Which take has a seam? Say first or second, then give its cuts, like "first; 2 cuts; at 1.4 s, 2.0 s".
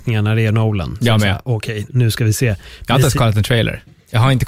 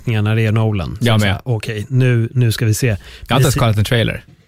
first; 1 cut; at 1.9 s